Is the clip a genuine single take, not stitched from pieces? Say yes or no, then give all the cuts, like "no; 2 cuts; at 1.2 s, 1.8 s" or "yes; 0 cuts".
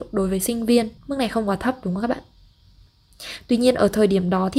no; 1 cut; at 1.0 s